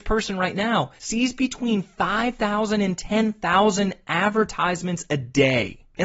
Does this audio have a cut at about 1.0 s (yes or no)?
yes